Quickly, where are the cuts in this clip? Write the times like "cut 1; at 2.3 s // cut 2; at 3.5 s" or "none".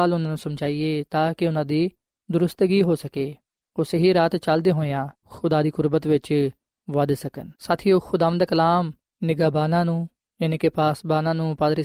cut 1; at 5.2 s // cut 2; at 7.6 s